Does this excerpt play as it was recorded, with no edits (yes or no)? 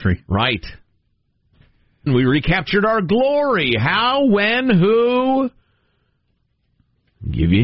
no